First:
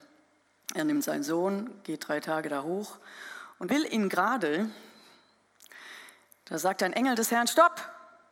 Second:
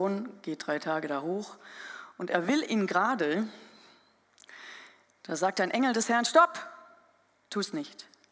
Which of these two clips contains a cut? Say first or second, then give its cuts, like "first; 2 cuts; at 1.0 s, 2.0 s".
first; 1 cut; at 3.7 s